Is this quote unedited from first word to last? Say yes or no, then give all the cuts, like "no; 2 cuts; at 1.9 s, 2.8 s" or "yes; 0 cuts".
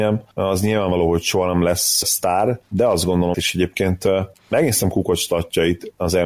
no; 2 cuts; at 2.0 s, 3.3 s